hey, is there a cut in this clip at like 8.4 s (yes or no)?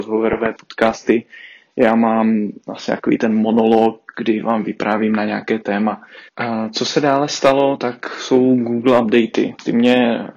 no